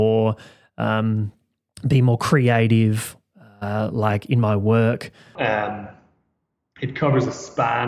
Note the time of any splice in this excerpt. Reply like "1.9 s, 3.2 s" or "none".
5.4 s